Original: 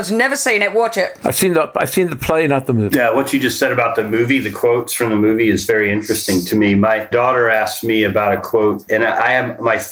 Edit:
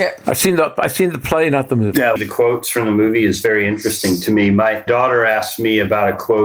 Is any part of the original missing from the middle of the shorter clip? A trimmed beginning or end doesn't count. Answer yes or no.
yes